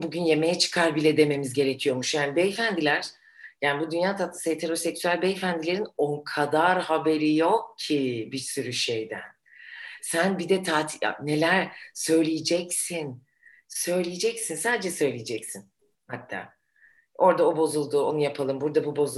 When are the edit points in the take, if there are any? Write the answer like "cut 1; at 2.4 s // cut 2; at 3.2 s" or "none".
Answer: none